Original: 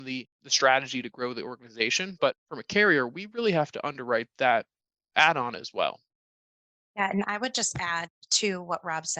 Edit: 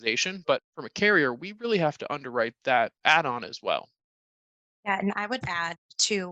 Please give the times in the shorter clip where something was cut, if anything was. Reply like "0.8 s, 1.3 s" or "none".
3.0 s, 5.4 s